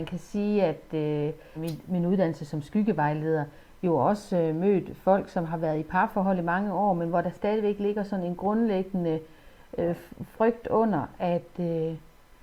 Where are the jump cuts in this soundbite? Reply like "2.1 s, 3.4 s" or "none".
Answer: 1.5 s